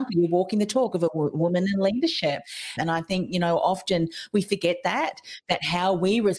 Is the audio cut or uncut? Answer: cut